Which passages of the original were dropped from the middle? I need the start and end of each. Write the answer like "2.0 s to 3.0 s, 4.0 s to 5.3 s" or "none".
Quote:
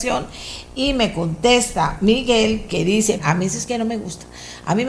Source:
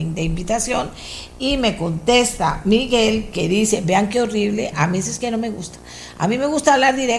3.8 s to 4.7 s